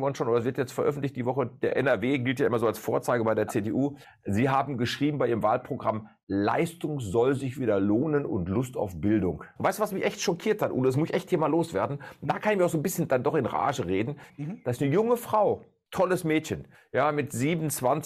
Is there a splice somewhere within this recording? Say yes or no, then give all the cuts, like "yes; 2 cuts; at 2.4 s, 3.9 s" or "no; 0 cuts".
yes; 2 cuts; at 9.6 s, 14.3 s